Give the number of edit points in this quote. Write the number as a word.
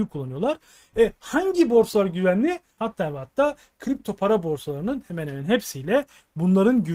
one